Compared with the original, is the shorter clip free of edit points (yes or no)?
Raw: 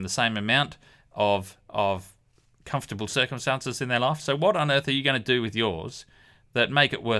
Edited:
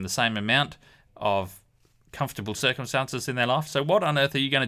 no